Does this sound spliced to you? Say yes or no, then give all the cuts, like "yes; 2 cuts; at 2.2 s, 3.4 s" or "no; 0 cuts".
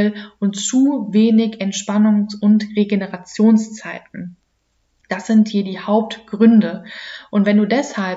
no; 0 cuts